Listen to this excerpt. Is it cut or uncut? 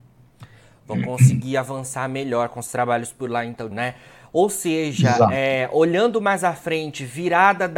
cut